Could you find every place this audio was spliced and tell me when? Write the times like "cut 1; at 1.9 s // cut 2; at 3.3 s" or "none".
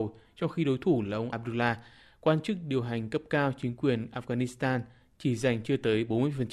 cut 1; at 1.3 s